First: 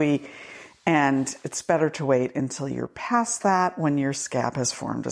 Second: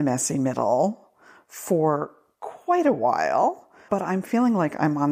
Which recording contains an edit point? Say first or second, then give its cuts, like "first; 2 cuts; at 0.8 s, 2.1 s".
second; 1 cut; at 3.9 s